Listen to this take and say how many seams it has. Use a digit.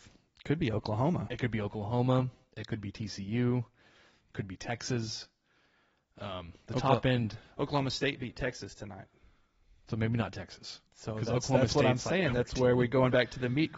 1